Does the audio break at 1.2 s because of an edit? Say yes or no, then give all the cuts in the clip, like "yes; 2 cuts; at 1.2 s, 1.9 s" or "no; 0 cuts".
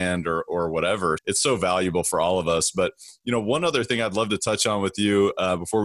yes; 1 cut; at 1.2 s